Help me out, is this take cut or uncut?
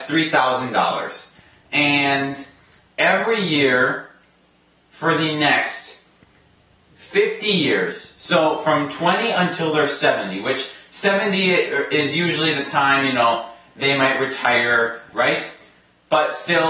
cut